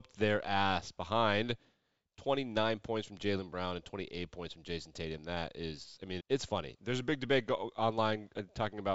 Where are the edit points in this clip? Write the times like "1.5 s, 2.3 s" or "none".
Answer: 6.2 s